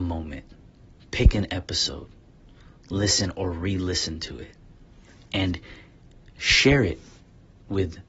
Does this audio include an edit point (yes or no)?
no